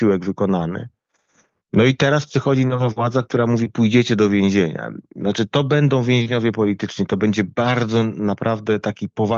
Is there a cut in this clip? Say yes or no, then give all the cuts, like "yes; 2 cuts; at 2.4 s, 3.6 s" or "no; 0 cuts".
no; 0 cuts